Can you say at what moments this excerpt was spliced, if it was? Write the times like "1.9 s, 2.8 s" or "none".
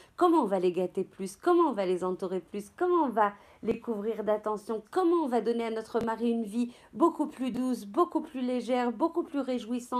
4.8 s